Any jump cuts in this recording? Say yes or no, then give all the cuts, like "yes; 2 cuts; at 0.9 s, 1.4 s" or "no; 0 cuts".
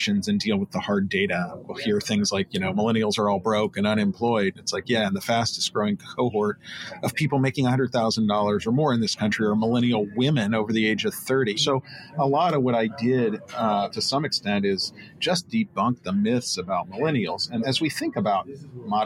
yes; 3 cuts; at 11.6 s, 13.9 s, 17.6 s